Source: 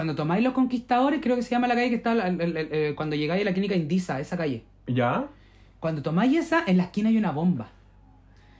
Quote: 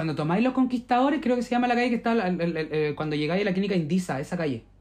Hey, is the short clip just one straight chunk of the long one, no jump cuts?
yes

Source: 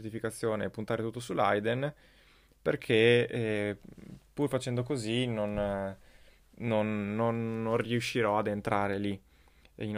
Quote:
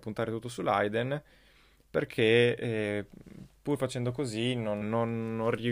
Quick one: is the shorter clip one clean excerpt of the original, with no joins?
no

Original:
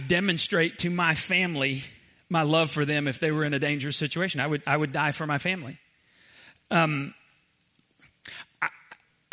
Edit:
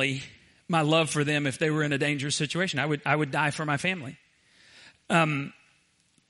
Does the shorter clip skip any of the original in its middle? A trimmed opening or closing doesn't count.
no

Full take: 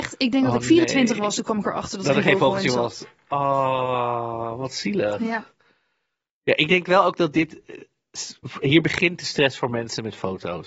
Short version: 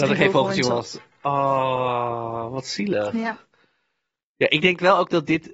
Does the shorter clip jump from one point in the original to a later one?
no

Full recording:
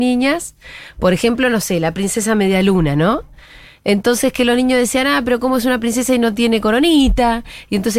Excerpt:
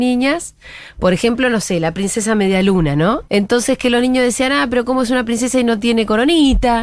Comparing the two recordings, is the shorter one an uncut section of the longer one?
no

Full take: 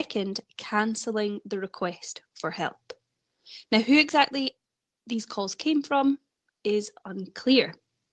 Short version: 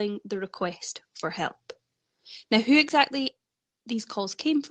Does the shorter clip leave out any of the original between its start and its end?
no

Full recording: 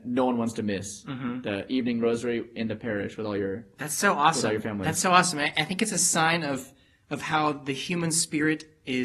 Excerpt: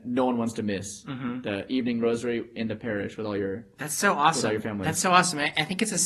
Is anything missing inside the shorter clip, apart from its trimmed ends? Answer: no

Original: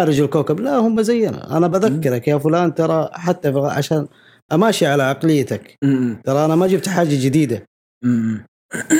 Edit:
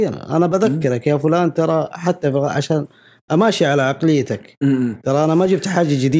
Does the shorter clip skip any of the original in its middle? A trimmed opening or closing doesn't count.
no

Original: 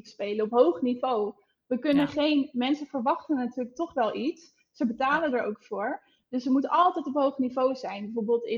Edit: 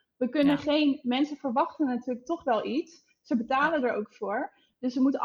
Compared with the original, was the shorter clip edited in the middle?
no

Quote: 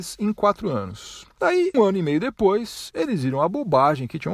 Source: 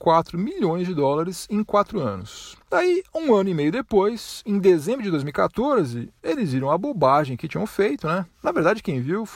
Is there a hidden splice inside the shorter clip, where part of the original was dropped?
yes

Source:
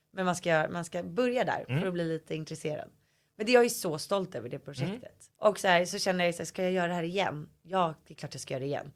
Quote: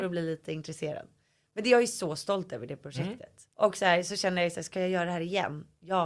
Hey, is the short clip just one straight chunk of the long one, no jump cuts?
yes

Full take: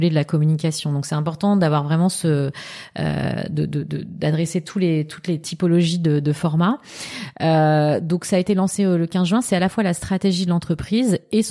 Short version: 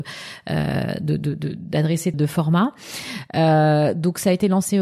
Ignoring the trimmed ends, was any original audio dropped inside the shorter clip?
yes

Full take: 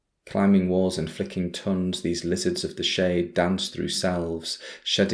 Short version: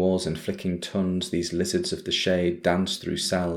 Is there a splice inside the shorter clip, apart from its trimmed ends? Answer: no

